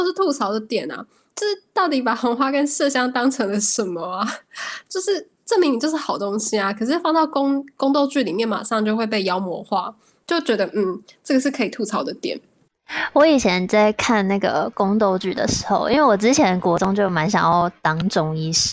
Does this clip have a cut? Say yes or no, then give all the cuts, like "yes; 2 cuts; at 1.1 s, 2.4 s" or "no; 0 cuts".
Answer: no; 0 cuts